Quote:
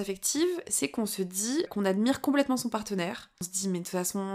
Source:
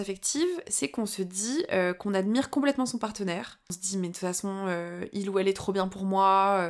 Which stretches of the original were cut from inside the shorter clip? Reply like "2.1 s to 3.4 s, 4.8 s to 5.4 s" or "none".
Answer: 1.7 s to 2.0 s

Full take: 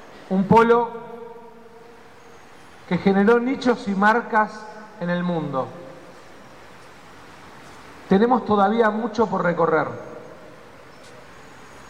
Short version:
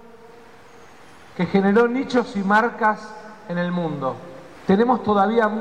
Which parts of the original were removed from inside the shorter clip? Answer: 6.1 s to 8.0 s

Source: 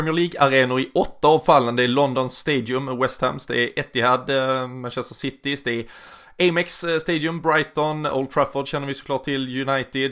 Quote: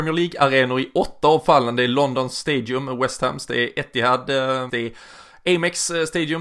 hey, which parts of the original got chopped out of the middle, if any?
4.7 s to 5.6 s

